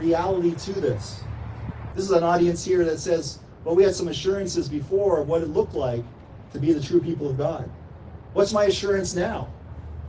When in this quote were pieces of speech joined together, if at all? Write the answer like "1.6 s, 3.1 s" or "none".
1.9 s

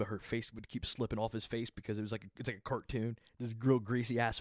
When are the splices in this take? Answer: none

